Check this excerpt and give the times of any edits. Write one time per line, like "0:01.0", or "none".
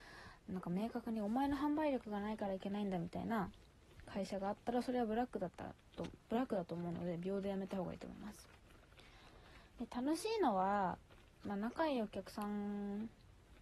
none